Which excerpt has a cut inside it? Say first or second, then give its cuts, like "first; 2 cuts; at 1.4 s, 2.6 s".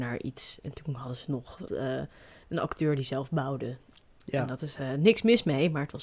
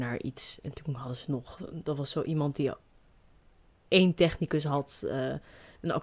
first; 1 cut; at 1.7 s